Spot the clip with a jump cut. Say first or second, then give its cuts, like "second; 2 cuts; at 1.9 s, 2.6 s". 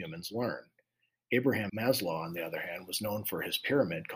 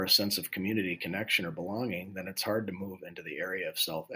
first; 1 cut; at 1.7 s